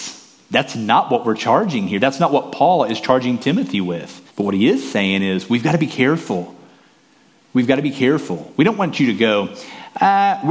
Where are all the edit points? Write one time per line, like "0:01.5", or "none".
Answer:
0:04.3